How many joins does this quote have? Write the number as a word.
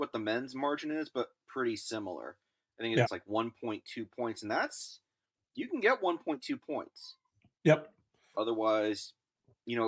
two